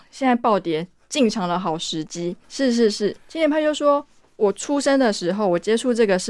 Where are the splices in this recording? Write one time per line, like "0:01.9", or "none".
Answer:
0:02.4